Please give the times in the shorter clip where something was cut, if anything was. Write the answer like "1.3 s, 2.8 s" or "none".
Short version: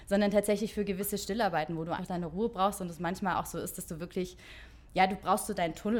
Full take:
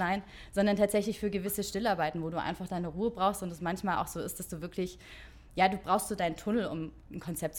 2.0 s